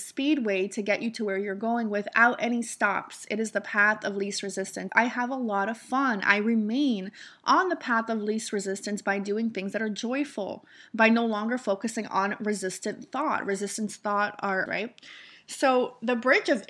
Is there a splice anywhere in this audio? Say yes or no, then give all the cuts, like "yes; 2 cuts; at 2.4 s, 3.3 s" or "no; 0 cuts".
yes; 2 cuts; at 4.9 s, 14.7 s